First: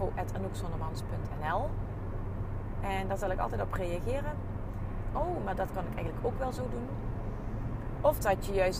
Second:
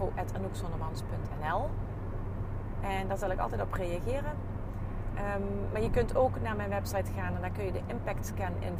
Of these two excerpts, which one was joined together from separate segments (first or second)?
first